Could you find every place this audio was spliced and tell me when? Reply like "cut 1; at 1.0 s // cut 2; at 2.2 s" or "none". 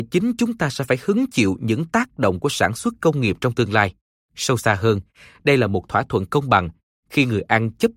cut 1; at 4.2 s